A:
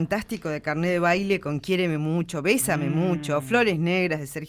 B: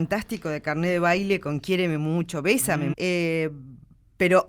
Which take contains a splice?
B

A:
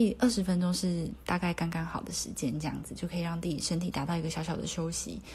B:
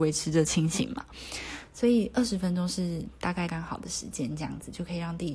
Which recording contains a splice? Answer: B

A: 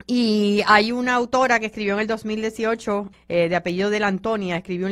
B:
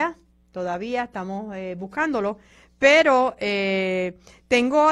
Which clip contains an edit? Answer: A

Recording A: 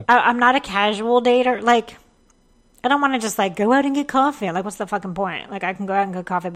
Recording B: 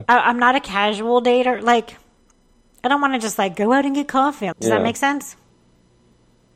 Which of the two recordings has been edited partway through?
B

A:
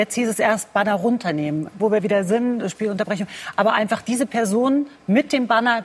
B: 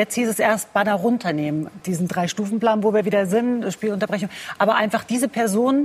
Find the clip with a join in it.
A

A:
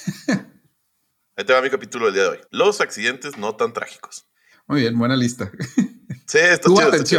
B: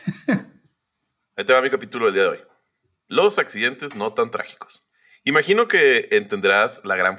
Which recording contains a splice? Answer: A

